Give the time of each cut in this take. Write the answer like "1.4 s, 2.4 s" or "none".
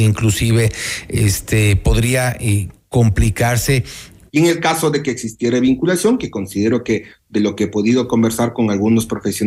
4.3 s